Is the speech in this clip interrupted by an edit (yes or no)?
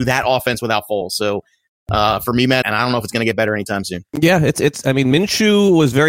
yes